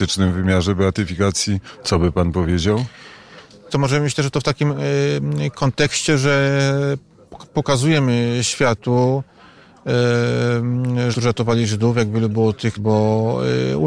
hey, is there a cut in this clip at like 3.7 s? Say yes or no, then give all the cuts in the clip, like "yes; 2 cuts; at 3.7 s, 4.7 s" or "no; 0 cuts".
yes; 3 cuts; at 3.7 s, 11.1 s, 12.8 s